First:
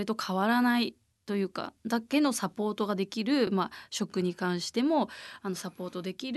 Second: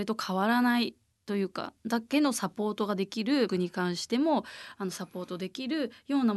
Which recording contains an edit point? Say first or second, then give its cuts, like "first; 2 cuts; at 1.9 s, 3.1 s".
second; 1 cut; at 3.5 s